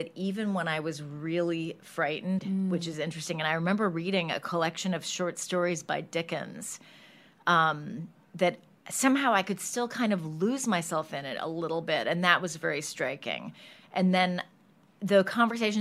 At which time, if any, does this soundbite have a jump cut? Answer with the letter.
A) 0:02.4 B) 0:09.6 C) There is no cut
A